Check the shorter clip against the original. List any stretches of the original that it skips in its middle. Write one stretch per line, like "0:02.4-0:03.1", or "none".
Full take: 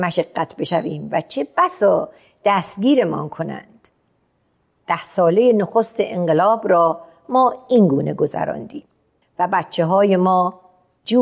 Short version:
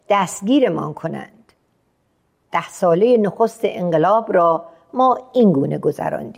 none